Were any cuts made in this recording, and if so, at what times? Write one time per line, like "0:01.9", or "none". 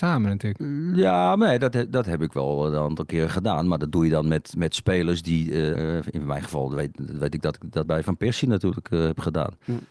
0:05.8
0:07.9